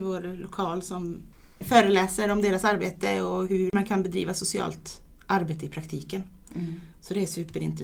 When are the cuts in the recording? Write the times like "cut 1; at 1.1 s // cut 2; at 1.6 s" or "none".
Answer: none